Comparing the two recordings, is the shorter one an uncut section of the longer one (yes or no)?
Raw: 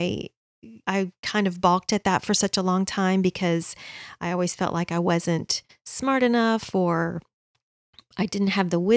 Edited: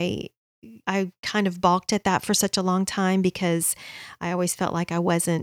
yes